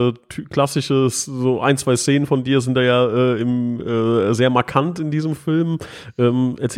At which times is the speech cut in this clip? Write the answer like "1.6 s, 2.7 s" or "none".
none